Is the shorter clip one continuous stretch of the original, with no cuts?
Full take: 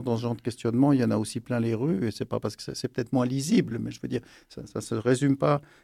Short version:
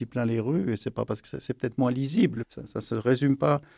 no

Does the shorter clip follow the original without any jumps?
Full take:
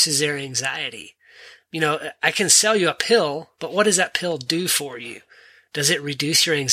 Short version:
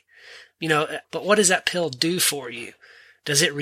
no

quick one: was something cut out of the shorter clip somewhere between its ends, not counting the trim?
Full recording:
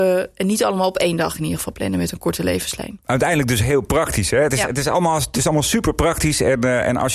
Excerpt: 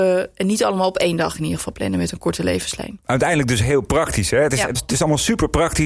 yes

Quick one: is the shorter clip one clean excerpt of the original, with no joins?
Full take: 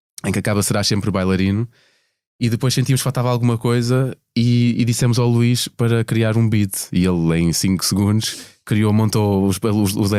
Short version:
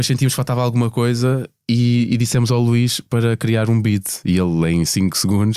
yes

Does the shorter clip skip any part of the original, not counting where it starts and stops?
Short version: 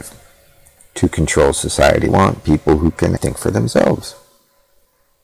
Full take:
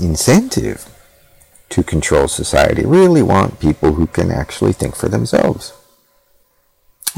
yes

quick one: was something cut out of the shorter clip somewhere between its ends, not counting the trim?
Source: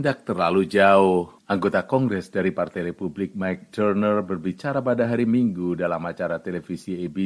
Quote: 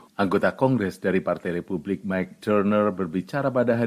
no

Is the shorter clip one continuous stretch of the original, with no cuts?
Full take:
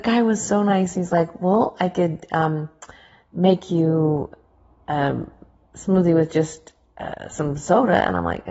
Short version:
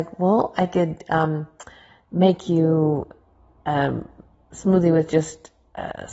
yes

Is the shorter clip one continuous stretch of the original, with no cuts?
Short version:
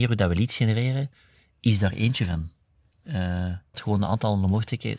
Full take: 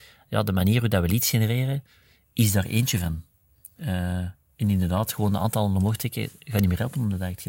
no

